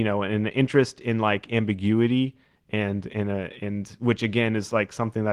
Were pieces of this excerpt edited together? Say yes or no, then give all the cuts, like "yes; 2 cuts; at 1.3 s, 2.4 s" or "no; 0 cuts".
no; 0 cuts